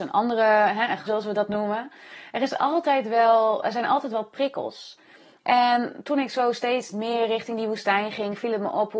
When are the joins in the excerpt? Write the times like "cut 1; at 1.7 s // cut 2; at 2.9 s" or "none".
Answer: cut 1; at 1.1 s